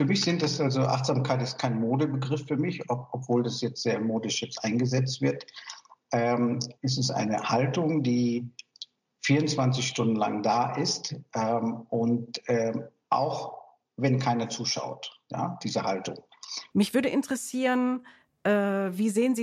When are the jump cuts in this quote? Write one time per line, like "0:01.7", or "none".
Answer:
0:06.8
0:16.7